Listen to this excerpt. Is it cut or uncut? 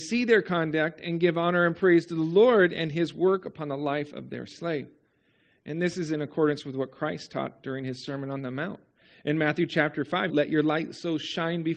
cut